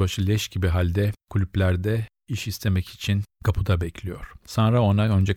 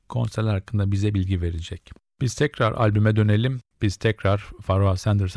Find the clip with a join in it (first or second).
second